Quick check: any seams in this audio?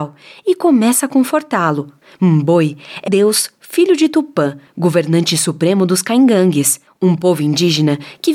yes; 1 cut; at 3.1 s

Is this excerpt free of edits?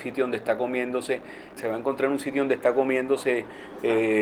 no; 1 cut; at 1.6 s

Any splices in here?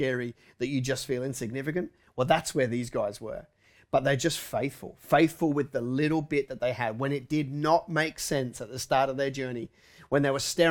no; 0 cuts

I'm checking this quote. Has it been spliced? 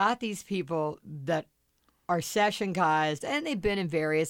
yes; 1 cut; at 3.2 s

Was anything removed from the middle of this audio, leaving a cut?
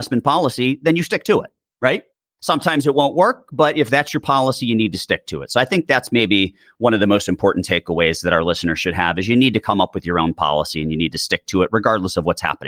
no; 0 cuts

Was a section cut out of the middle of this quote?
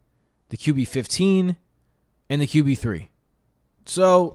no; 0 cuts

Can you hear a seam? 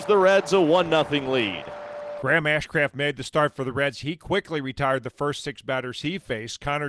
no; 0 cuts

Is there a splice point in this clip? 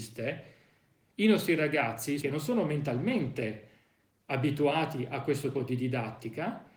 yes; 2 cuts; at 2.2 s, 5.5 s

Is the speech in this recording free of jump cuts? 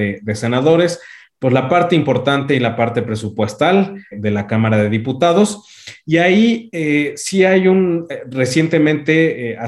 no; 1 cut; at 4.1 s

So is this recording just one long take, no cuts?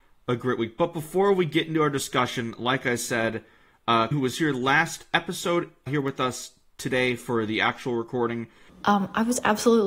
no; 3 cuts; at 4.1 s, 5.9 s, 8.7 s

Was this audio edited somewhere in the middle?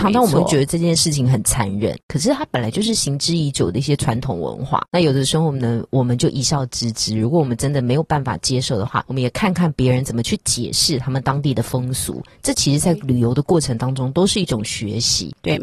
no; 0 cuts

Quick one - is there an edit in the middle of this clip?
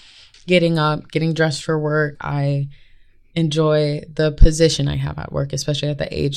yes; 1 cut; at 2.1 s

